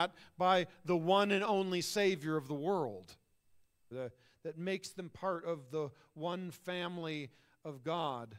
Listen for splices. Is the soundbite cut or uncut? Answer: cut